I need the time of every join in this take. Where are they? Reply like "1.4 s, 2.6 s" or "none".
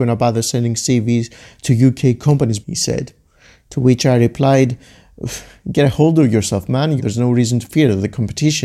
2.6 s, 7.0 s